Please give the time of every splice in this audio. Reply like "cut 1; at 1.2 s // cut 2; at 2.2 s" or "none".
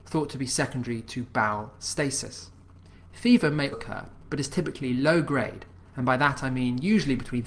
cut 1; at 3.7 s